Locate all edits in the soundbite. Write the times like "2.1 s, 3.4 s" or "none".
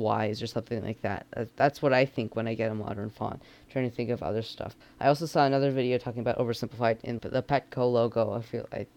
4.8 s, 7.2 s